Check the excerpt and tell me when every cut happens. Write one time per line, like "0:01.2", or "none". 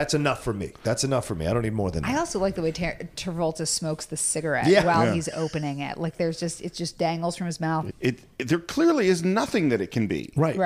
0:07.9